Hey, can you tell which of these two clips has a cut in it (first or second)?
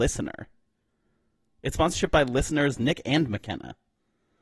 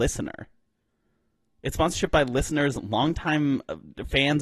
first